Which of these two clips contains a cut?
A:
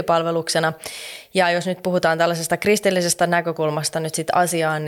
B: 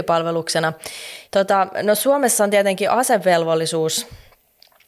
B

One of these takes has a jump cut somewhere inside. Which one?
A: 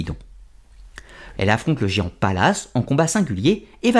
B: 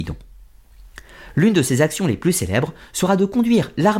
A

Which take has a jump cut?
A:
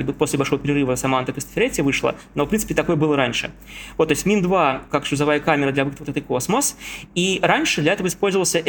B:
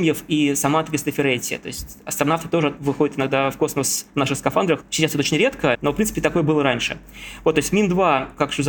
B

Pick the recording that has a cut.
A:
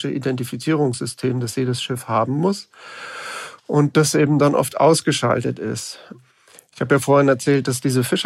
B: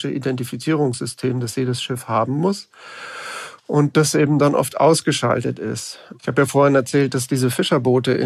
B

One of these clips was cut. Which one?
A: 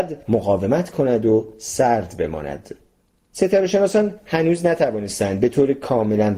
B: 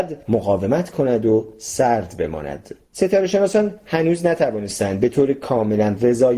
B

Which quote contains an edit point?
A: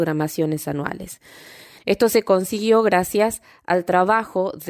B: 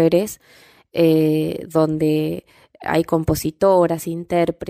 A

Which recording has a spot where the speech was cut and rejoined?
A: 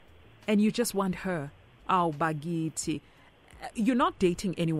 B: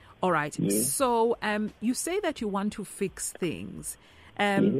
A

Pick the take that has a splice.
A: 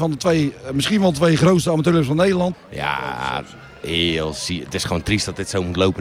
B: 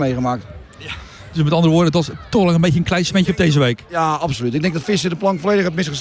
A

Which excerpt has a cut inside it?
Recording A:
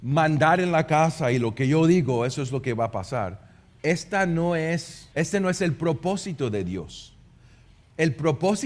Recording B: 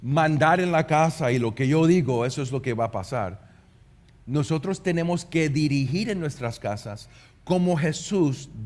A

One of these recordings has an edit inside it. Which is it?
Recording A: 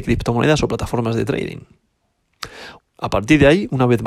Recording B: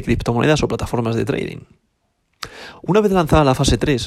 A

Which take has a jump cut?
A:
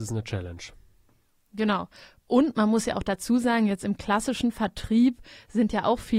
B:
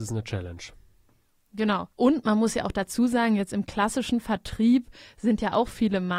B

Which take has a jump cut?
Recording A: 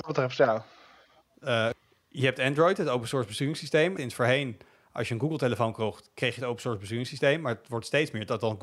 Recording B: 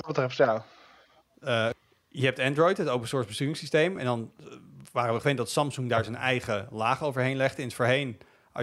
A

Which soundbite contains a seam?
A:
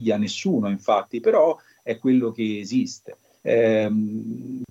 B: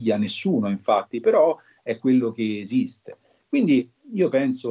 A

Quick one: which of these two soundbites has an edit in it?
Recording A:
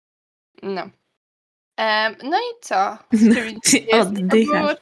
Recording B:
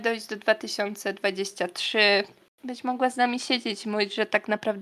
A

